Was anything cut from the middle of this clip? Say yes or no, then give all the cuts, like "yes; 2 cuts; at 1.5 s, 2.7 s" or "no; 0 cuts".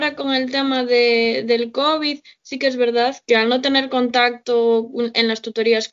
yes; 1 cut; at 3.3 s